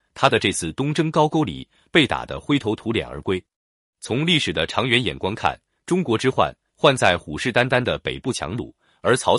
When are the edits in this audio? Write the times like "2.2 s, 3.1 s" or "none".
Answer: none